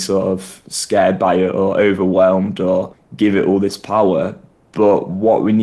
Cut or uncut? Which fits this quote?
uncut